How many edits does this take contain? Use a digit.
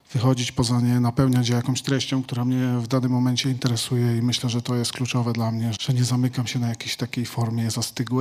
1